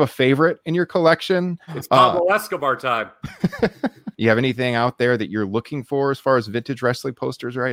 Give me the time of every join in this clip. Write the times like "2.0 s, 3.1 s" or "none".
1.7 s, 4.1 s